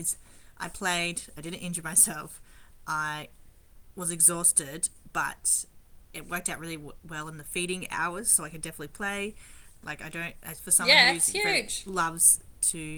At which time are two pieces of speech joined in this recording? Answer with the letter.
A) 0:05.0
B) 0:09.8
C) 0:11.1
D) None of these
B